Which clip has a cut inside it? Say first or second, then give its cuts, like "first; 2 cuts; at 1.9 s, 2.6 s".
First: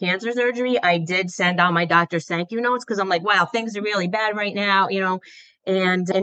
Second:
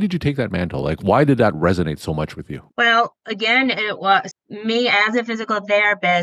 second; 2 cuts; at 2.7 s, 4.3 s